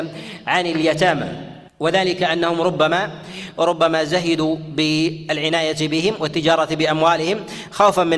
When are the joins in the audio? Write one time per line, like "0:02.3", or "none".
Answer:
0:01.7